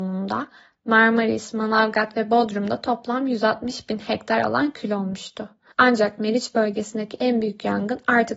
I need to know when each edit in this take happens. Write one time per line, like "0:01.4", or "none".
0:05.7